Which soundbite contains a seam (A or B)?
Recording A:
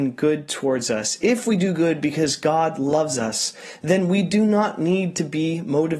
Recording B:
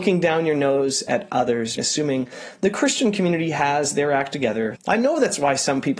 B